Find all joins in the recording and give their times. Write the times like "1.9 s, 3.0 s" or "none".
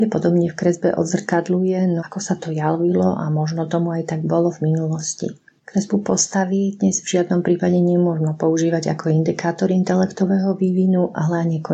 2.0 s